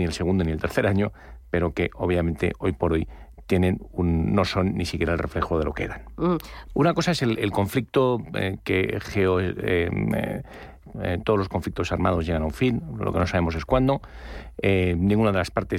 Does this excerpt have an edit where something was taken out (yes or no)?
yes